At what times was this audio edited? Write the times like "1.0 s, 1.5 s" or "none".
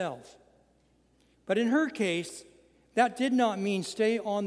1.3 s